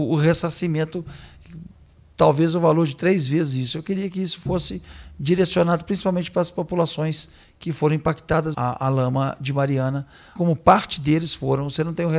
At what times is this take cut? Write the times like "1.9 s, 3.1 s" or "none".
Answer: 8.5 s, 10.4 s